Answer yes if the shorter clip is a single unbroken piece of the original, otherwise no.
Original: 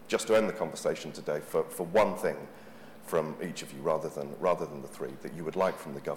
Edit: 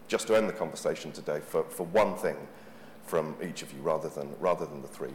yes